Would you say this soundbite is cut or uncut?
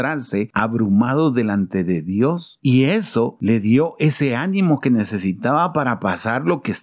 uncut